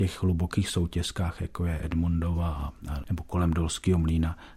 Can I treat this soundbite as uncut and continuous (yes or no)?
no